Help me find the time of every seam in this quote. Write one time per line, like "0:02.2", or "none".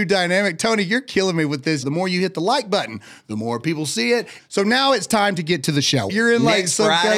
0:01.8
0:04.4
0:06.1